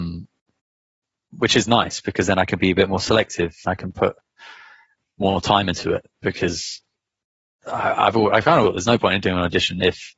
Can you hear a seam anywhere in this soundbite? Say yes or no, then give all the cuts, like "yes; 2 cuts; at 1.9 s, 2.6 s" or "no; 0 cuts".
yes; 2 cuts; at 3.6 s, 8.6 s